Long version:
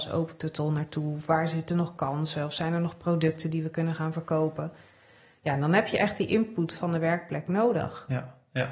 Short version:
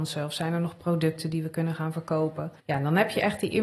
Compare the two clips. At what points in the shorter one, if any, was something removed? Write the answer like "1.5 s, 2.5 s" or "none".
2.6 s